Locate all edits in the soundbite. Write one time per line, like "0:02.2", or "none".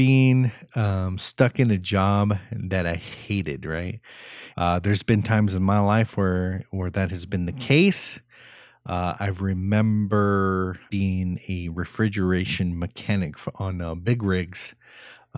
0:04.5
0:10.9